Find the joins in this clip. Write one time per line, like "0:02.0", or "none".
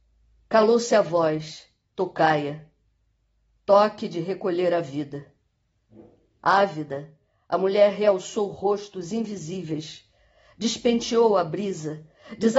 none